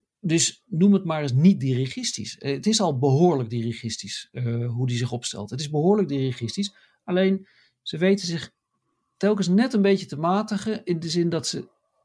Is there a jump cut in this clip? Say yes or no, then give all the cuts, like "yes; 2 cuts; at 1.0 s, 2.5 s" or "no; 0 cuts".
no; 0 cuts